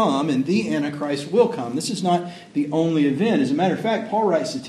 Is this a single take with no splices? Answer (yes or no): yes